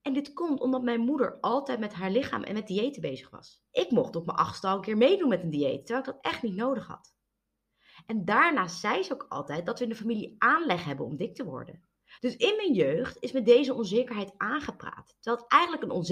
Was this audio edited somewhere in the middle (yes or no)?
yes